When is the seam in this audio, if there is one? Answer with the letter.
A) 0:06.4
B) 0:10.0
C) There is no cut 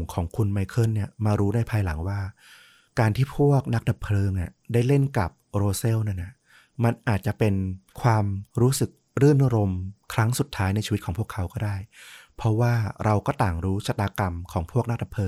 B